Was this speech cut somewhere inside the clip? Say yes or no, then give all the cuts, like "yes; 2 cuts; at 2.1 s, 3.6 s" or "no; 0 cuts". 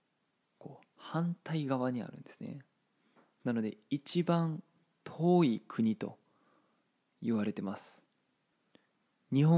no; 0 cuts